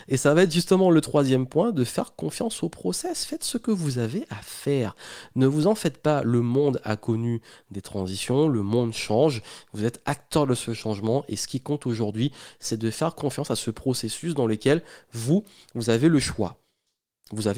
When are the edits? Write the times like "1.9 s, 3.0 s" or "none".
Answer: none

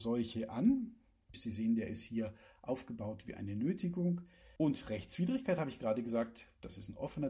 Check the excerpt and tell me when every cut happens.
1.3 s, 4.6 s

